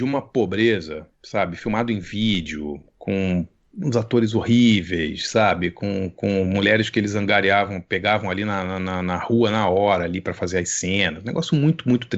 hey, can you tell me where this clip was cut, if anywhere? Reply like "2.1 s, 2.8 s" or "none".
none